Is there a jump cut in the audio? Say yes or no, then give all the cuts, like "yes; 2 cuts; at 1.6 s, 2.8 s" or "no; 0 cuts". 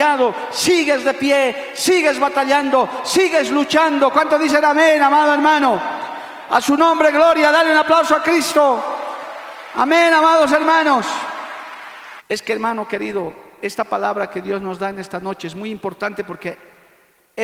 yes; 1 cut; at 12.2 s